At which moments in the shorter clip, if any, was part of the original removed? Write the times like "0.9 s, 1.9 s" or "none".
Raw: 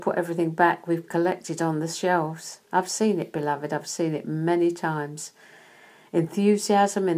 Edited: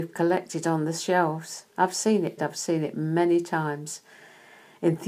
2.4 s

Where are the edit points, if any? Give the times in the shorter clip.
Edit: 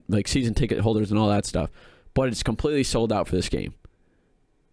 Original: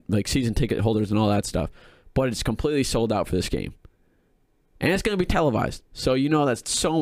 none

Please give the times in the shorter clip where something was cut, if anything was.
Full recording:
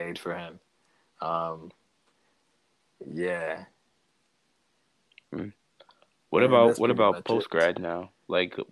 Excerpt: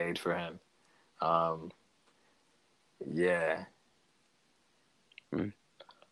none

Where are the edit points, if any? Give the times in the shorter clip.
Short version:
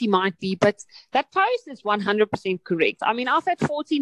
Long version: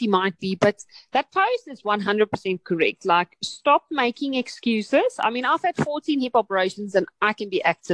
3.0 s

